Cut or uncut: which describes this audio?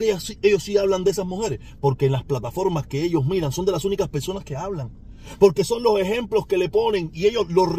uncut